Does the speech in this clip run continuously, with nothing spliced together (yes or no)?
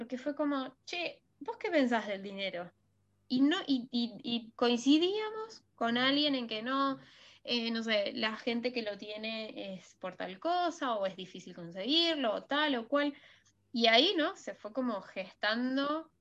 yes